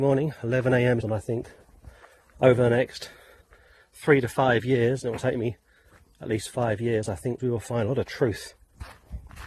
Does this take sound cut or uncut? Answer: cut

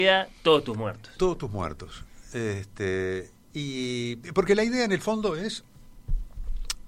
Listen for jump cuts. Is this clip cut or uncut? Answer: uncut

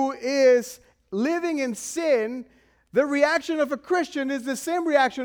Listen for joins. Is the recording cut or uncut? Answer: uncut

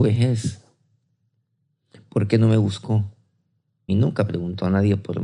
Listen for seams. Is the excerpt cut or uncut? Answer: cut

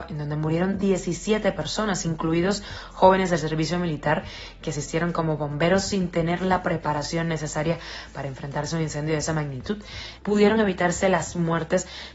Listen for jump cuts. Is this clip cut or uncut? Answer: cut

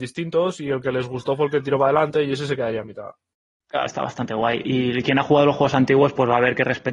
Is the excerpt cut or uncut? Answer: cut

